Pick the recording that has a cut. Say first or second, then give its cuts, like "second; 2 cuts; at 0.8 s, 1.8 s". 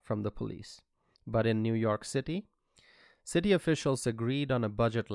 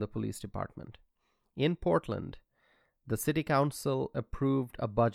first; 1 cut; at 1.1 s